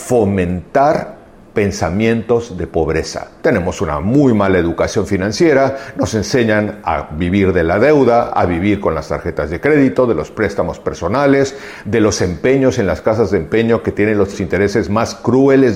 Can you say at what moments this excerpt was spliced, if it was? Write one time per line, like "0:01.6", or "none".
0:03.4